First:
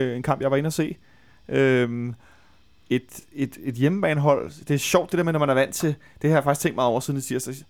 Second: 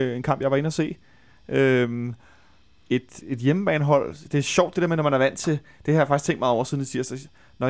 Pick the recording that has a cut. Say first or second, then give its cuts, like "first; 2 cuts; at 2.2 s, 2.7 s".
second; 1 cut; at 3.2 s